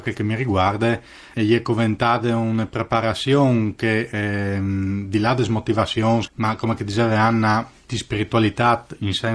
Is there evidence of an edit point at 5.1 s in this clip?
no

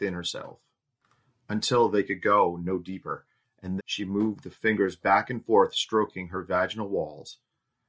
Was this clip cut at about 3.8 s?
yes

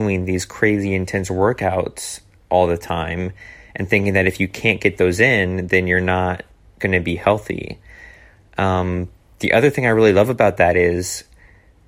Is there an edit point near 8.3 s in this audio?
no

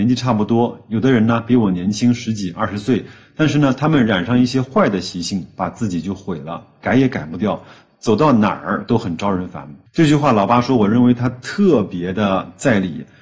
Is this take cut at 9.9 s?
yes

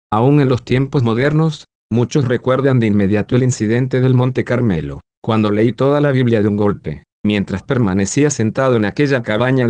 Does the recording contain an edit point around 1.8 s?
yes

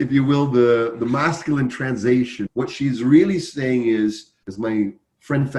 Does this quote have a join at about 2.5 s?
yes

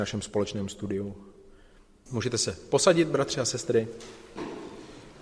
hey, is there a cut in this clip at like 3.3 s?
no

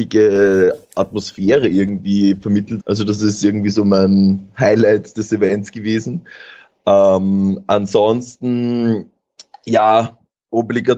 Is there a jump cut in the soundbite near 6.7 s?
no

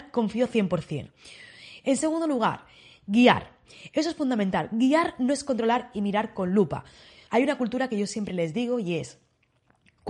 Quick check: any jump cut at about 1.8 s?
yes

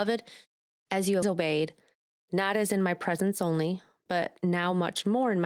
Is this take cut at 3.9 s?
no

